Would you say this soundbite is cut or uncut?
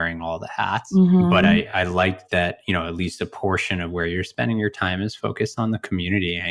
uncut